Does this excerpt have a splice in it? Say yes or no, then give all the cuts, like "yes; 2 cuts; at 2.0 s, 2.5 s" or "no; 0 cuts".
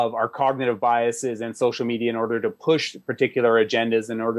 no; 0 cuts